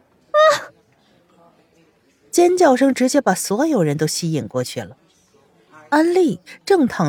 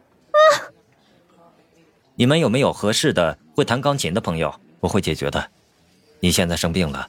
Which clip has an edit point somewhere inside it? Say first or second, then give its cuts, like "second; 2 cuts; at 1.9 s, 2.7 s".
second; 2 cuts; at 2.0 s, 4.8 s